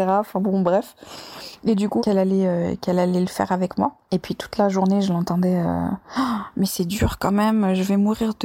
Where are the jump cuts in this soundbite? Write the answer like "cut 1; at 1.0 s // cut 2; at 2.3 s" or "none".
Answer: cut 1; at 2.0 s